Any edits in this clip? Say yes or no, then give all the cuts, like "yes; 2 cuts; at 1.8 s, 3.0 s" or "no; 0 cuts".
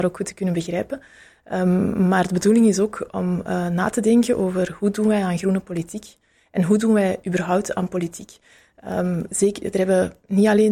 no; 0 cuts